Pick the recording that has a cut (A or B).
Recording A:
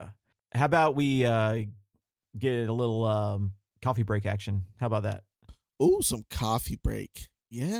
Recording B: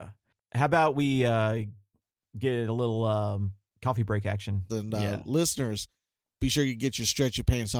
B